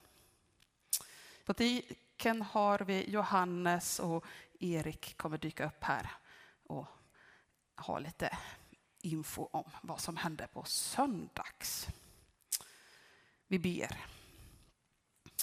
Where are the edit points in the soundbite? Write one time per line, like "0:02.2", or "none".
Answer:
0:01.4

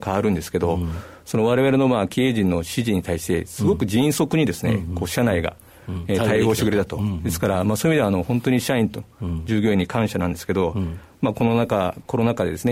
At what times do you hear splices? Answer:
none

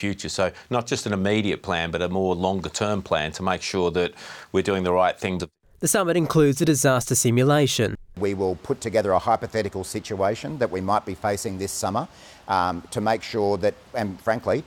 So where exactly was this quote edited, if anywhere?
0:05.4
0:08.1

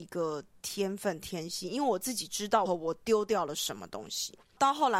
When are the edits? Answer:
0:02.6

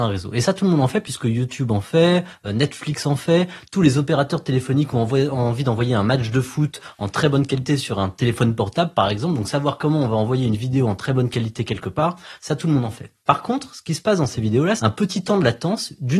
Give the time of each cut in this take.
0:13.2
0:14.8

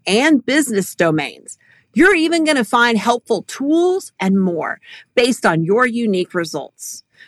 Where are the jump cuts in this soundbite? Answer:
0:04.2

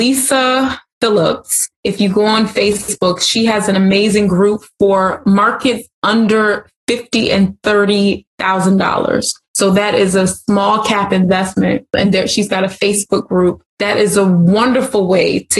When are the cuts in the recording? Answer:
none

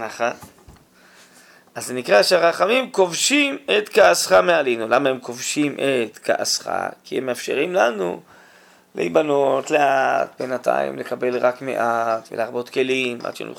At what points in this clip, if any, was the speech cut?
0:09.6
0:12.3

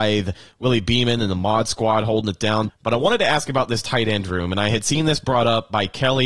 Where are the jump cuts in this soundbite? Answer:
0:02.7

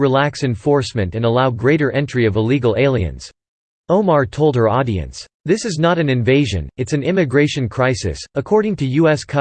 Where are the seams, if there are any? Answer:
0:03.8
0:05.3

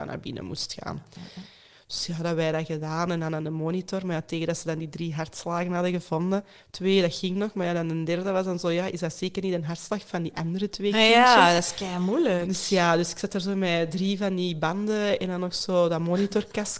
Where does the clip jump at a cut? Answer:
none

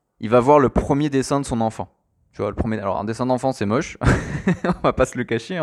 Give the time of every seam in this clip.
none

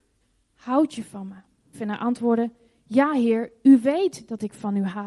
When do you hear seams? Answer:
0:01.7

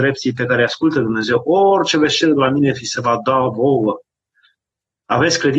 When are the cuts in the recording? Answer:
none

